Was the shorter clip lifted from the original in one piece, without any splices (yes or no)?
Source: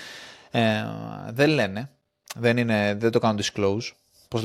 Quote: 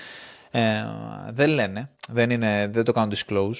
no